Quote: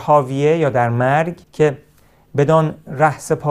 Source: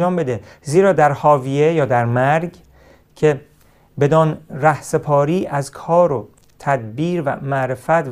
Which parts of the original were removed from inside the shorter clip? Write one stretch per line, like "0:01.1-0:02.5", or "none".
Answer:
0:02.6-0:03.1

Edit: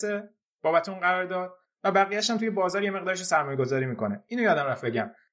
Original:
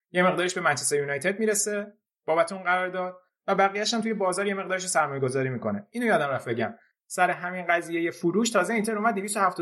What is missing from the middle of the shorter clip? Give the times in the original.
none

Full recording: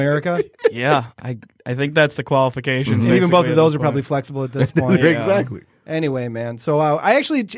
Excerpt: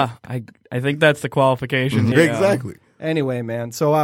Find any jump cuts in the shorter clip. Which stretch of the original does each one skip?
0:03.1-0:05.0

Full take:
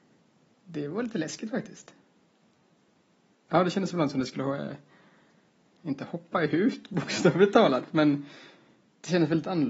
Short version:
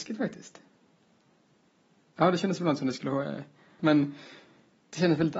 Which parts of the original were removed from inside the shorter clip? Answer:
0:05.1-0:07.9

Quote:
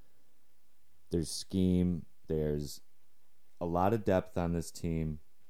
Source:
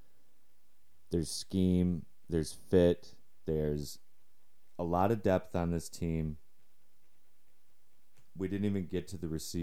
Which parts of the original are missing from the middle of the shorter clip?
0:02.3-0:03.4

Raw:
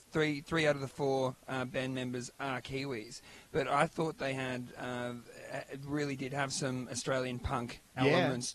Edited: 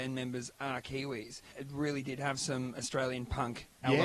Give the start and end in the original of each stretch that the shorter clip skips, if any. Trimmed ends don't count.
0:03.3-0:05.6

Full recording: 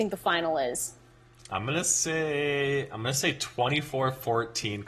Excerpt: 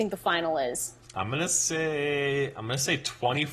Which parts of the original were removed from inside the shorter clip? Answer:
0:01.0-0:01.4

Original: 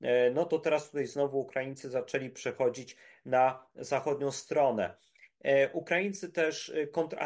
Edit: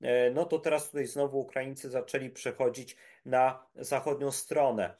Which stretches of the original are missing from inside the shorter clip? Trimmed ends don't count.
none

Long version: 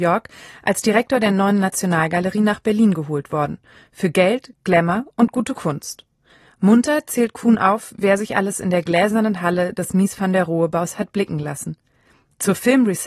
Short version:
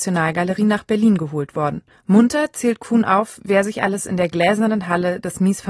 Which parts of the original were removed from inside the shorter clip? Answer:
0:03.7-0:06.4

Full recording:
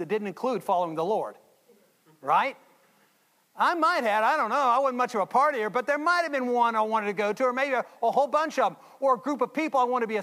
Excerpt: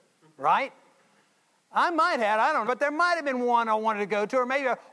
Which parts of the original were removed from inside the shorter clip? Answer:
0:04.5-0:05.7

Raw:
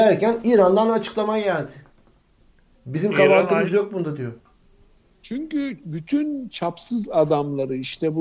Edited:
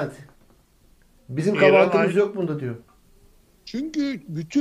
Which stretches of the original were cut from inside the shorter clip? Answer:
none

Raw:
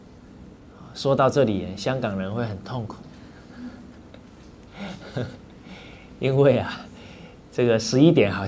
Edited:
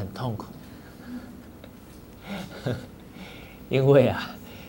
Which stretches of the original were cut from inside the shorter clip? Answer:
none

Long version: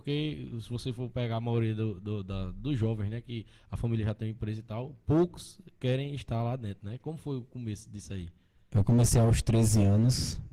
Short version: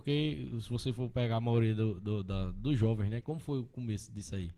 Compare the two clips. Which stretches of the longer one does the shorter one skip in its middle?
0:03.2-0:07.0

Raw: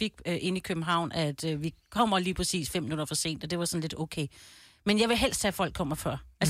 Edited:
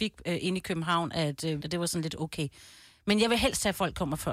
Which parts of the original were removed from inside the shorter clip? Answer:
0:01.6-0:03.4

